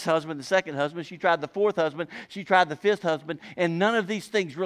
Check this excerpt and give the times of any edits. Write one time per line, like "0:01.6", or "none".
0:01.0